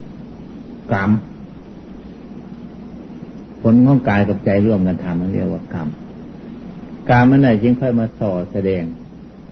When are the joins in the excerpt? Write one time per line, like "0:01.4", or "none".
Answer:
none